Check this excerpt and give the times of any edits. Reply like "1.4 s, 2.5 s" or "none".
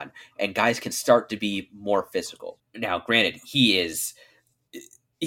2.6 s